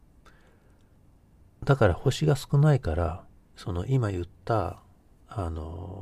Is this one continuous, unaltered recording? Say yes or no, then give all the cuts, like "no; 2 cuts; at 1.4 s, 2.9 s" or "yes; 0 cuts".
no; 2 cuts; at 1.4 s, 3.5 s